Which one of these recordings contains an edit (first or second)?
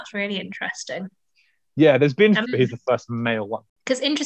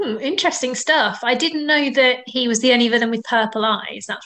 first